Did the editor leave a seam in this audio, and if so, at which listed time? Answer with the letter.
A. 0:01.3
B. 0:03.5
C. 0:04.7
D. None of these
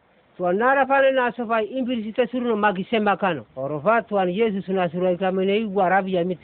B